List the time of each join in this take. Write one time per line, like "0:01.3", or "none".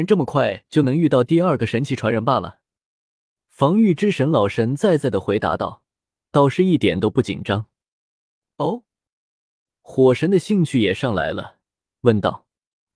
0:11.9